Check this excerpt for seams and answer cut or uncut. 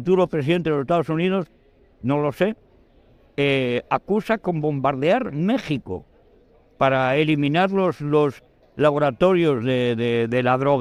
uncut